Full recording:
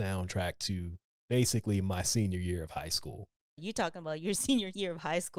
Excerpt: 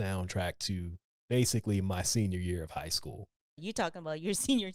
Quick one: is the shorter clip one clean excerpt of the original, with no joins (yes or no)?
yes